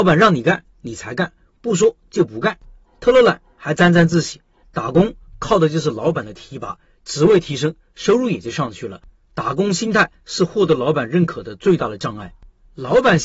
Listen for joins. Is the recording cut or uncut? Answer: cut